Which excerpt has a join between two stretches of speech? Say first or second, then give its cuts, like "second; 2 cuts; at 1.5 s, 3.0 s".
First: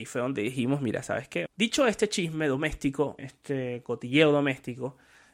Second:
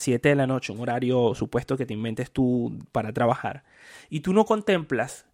first; 2 cuts; at 1.5 s, 3.2 s